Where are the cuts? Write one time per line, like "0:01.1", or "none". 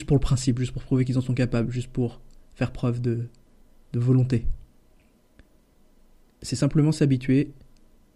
0:06.3